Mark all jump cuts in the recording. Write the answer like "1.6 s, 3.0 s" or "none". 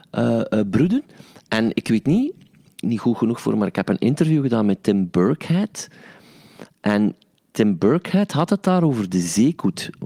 2.8 s